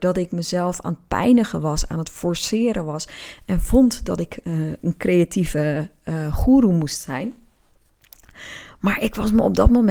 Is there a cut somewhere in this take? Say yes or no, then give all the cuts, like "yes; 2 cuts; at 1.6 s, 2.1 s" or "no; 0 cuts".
no; 0 cuts